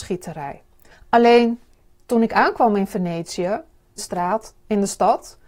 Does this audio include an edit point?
yes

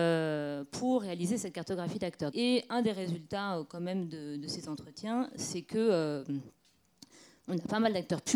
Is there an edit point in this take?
yes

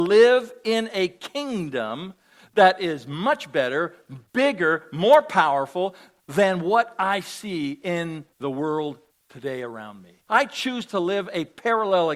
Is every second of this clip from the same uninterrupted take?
no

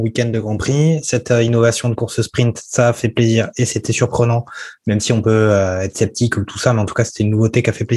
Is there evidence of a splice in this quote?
no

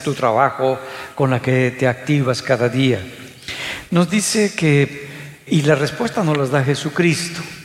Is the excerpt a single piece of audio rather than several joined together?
no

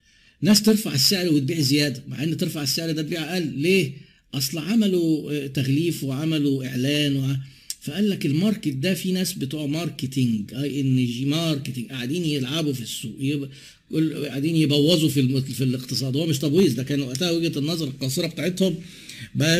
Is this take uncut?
yes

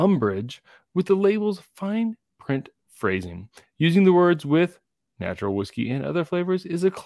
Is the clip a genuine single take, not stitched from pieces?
yes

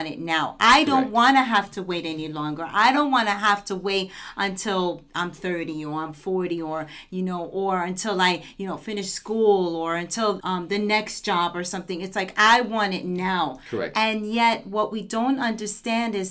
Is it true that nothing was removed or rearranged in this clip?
no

